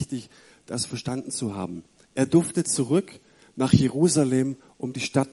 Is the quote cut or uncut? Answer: cut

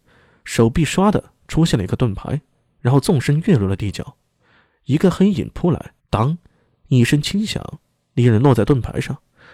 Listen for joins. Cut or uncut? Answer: cut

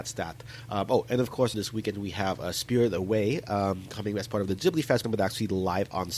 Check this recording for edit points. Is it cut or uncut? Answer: cut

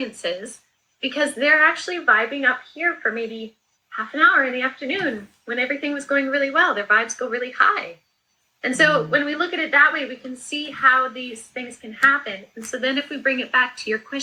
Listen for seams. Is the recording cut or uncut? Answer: uncut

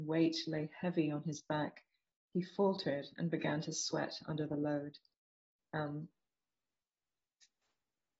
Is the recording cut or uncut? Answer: cut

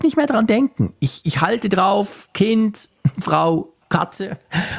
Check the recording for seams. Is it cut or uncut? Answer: uncut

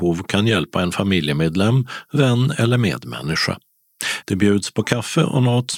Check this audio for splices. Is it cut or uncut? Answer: cut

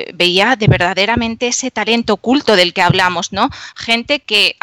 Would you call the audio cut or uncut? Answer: uncut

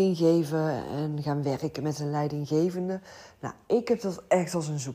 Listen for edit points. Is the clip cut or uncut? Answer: uncut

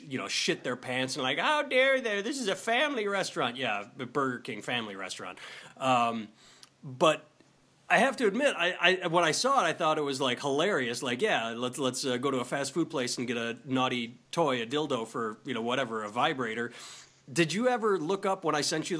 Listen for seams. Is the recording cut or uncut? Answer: uncut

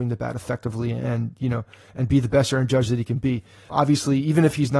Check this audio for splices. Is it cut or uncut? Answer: cut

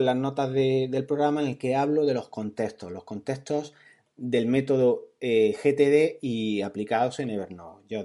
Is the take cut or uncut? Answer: uncut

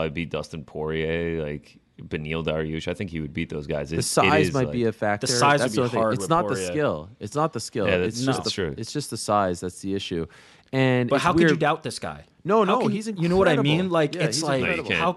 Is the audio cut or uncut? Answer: uncut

